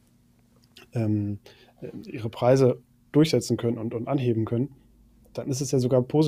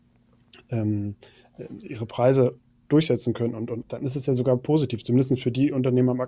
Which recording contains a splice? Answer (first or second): second